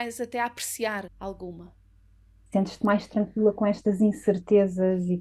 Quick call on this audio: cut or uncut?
cut